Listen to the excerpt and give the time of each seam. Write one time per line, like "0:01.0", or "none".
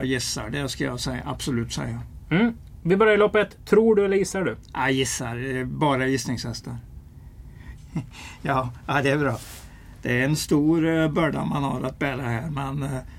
0:07.8